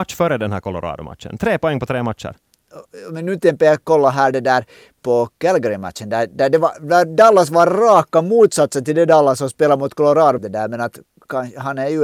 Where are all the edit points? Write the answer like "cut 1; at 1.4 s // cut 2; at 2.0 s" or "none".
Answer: cut 1; at 3.8 s // cut 2; at 10.4 s